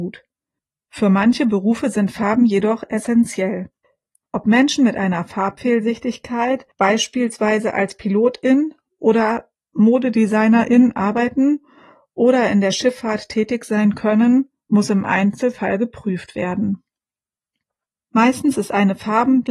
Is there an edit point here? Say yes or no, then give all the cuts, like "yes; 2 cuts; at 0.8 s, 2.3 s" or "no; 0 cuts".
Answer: no; 0 cuts